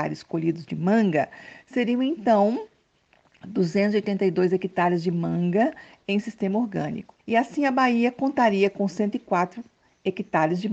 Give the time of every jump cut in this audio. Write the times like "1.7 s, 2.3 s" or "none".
7.2 s